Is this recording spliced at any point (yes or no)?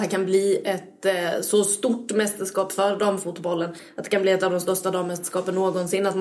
no